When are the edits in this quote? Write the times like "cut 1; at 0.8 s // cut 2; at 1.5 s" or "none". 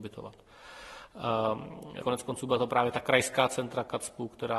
cut 1; at 2.0 s